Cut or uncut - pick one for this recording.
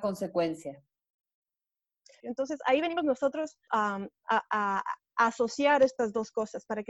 cut